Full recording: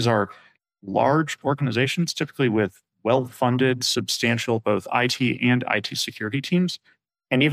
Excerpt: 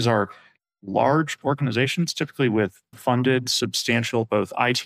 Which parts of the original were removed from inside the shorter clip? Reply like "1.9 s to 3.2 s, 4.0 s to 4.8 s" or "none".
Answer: 2.9 s to 3.3 s